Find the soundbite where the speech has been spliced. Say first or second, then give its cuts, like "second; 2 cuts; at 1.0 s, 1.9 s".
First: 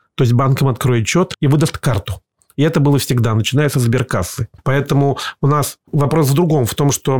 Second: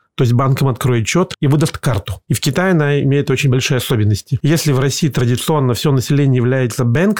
second; 1 cut; at 2.3 s